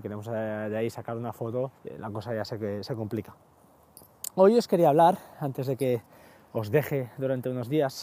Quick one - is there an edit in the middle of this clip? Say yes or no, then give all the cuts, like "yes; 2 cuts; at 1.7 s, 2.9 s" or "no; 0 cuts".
yes; 1 cut; at 1.8 s